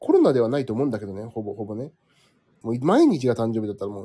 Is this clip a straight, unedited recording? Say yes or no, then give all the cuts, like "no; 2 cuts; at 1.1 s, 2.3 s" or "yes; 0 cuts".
no; 1 cut; at 2.6 s